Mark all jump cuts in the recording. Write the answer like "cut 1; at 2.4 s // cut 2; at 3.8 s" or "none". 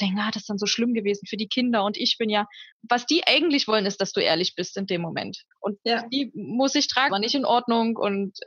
cut 1; at 2.7 s // cut 2; at 5.5 s // cut 3; at 7.1 s